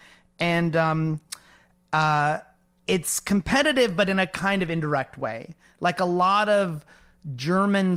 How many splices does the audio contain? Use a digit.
0